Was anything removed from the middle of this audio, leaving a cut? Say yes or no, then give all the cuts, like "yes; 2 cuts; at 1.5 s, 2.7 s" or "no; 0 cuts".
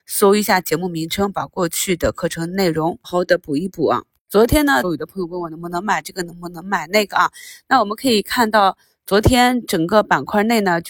yes; 2 cuts; at 3.0 s, 4.8 s